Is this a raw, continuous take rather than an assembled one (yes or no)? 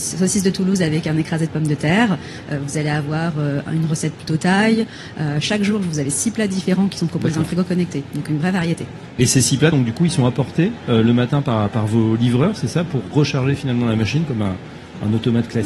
yes